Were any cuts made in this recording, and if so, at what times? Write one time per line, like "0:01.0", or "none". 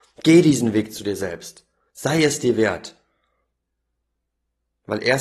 none

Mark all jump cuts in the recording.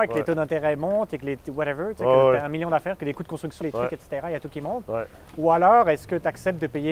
0:03.6

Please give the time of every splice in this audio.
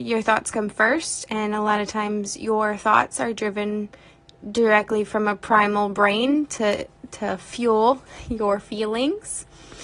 none

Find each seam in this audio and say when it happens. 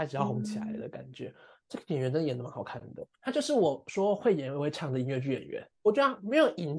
0:03.2
0:05.8

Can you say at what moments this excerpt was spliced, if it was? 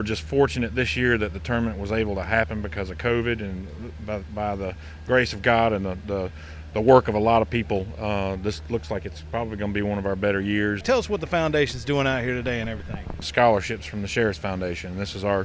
0:10.8
0:13.2

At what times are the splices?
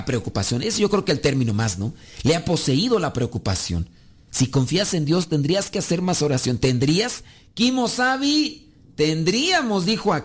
0:04.3

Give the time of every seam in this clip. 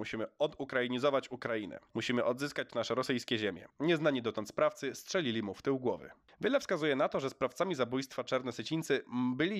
0:03.7

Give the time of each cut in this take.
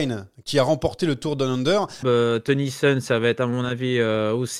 0:02.0

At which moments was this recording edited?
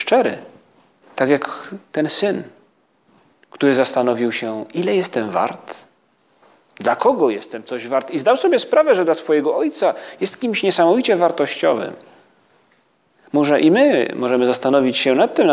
0:01.0

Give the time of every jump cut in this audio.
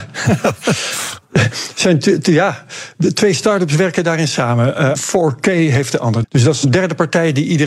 0:04.9
0:06.2

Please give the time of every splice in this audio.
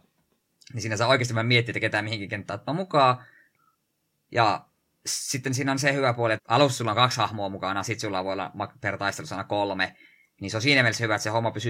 0:06.4

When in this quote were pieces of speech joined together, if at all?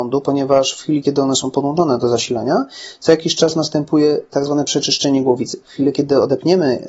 none

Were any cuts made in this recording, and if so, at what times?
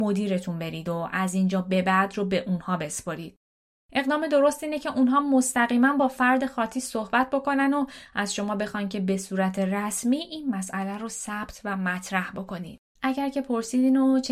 0:13.0

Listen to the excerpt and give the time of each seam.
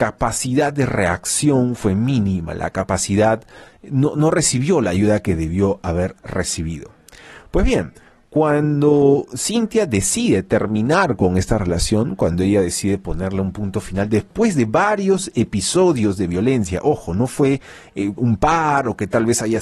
0:18.2

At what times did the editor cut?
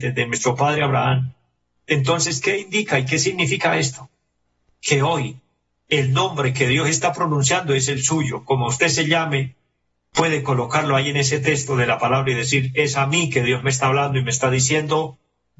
none

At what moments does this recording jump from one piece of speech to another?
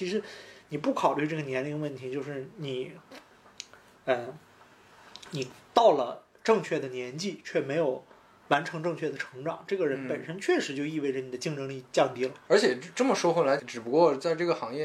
0:12.5
0:13.6

